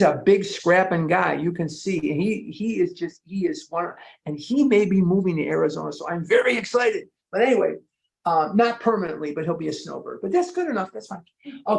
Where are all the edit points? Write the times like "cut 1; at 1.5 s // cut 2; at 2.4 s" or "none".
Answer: none